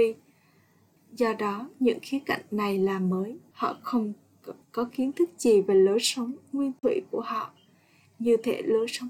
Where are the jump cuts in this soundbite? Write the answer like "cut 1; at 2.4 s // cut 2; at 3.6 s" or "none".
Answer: cut 1; at 1.0 s // cut 2; at 3.5 s // cut 3; at 4.6 s

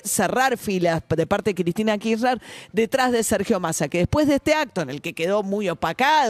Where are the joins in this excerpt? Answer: none

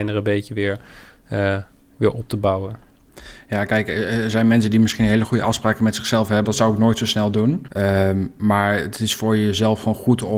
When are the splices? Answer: cut 1; at 6.4 s // cut 2; at 7.7 s

